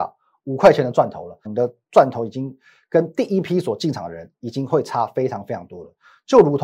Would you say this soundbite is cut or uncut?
cut